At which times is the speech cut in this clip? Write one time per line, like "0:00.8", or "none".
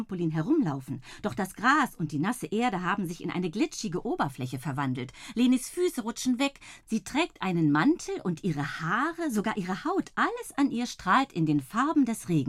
0:06.8

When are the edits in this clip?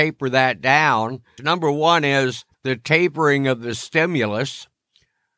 0:01.4
0:02.5

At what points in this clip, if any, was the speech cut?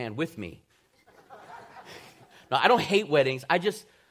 none

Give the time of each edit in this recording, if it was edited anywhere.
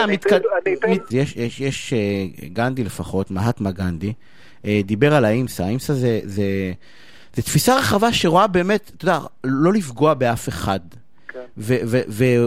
0:01.1

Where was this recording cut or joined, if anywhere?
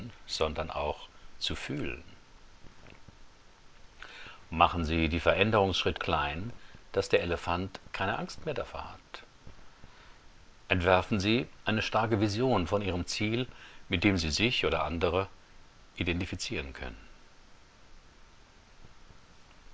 0:06.0

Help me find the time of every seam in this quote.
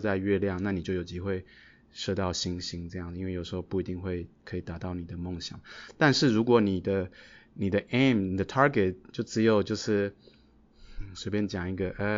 none

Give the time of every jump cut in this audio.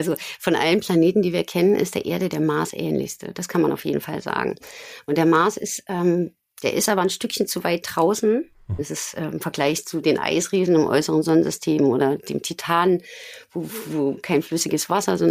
0:08.8

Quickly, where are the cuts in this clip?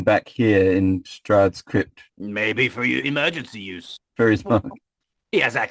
0:04.1

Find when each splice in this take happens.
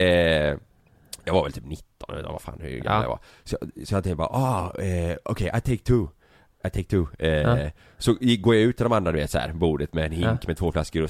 none

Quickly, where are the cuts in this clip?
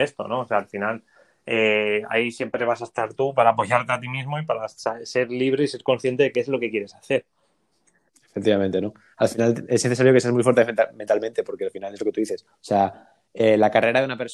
none

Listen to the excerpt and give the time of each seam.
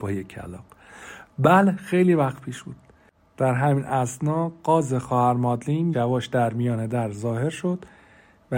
0:05.9

